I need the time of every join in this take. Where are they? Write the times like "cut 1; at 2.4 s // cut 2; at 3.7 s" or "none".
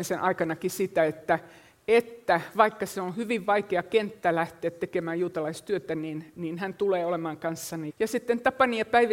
cut 1; at 7.9 s